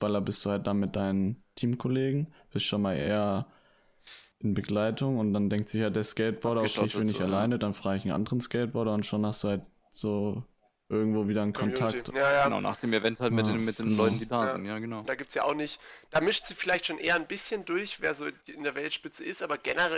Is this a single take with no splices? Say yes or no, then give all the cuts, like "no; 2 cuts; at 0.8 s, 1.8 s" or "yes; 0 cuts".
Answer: no; 1 cut; at 15.0 s